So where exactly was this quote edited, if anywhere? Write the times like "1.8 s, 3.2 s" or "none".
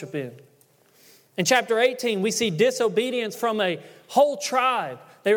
none